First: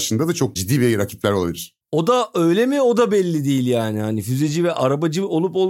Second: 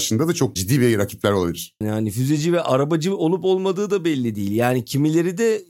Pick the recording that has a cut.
second; 1 cut; at 1.8 s

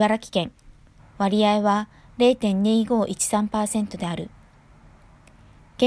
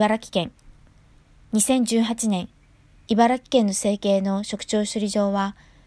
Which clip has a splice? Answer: first; 1 cut; at 1.0 s

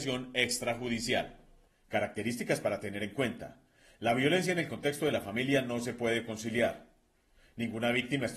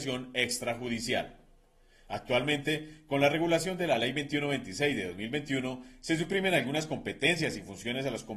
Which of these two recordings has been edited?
first; 1 cut; at 1.7 s

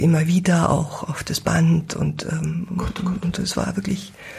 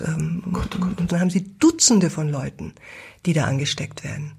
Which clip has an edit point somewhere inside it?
second; 1 cut; at 1.1 s

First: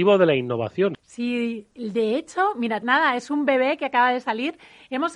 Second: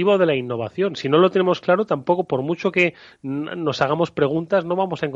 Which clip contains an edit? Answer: first; 2 cuts; at 0.9 s, 2.8 s

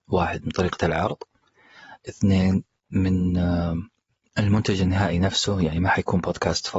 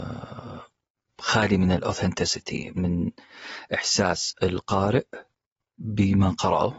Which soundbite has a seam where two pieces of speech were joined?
second; 1 cut; at 2.7 s

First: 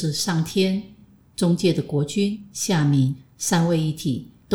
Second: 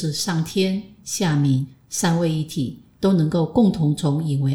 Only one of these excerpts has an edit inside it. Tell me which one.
second; 1 cut; at 1.0 s

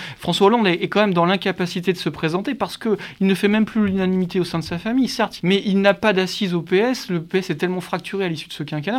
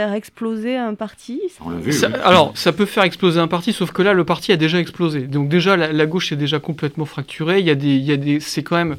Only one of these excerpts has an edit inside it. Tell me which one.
first; 1 cut; at 5.4 s

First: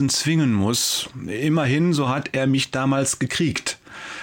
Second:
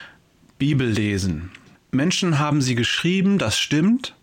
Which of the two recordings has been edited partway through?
second; 1 cut; at 1.7 s

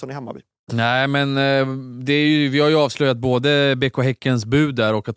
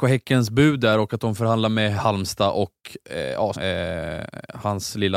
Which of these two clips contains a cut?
second; 1 cut; at 3.5 s

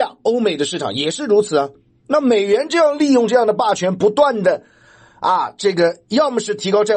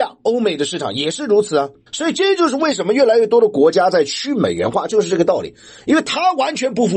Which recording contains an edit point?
second; 1 cut; at 1.9 s

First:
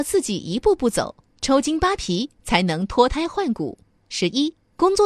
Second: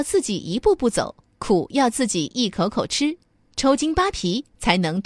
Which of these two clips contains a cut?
first; 2 cuts; at 1.3 s, 4.0 s

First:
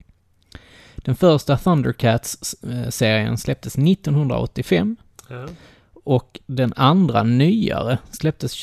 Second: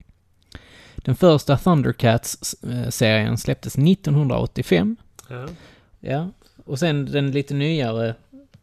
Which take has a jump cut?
second; 1 cut; at 5.9 s

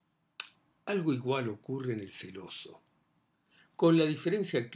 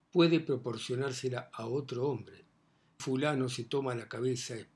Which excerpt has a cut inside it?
second; 1 cut; at 3.0 s

